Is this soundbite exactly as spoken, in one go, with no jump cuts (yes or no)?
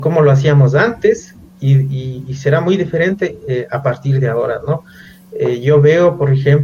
yes